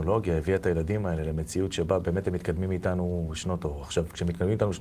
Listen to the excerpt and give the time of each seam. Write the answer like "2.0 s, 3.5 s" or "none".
none

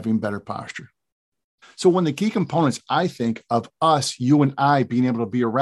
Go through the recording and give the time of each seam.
1.6 s

